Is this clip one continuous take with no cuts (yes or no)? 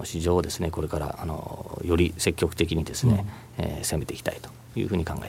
yes